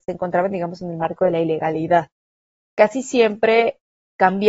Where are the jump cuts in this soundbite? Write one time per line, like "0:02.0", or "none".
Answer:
none

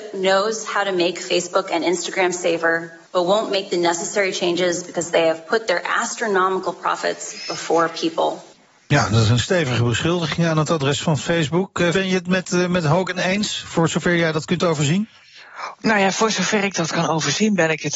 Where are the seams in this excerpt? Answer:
0:11.9

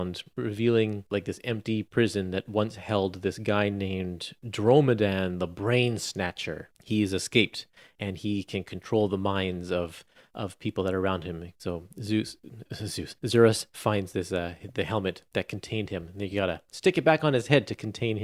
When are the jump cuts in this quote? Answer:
none

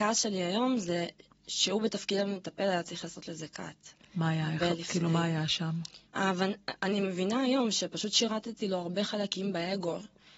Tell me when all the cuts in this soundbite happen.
0:06.1

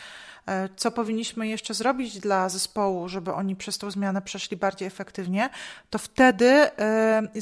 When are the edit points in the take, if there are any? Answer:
none

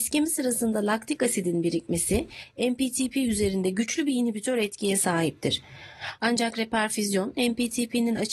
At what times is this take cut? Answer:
0:06.2

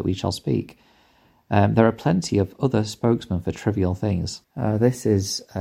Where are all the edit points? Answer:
0:04.4

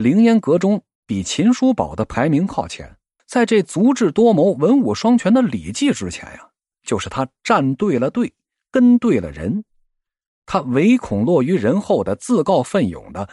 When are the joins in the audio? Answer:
0:03.2
0:06.7

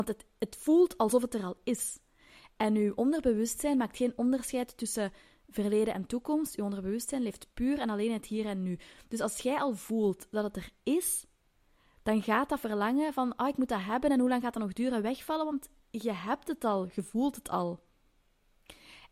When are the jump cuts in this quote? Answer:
none

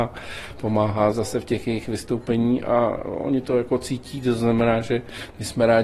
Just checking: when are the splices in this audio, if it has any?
0:01.1

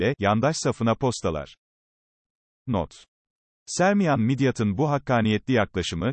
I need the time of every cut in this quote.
none

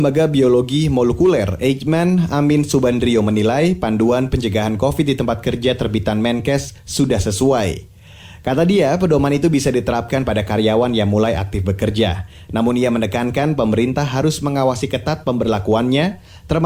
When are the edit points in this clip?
none

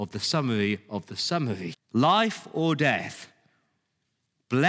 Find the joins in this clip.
0:01.7

